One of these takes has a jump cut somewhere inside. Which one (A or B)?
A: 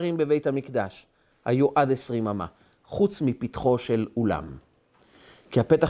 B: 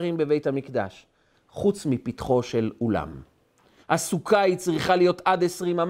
B